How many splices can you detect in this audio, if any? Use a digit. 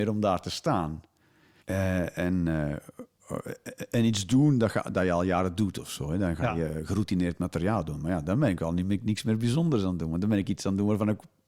1